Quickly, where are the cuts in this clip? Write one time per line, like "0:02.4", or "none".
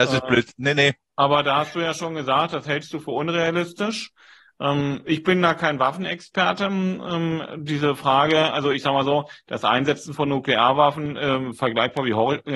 none